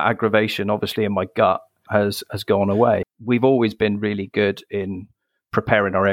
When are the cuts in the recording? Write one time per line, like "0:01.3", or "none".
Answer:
0:03.0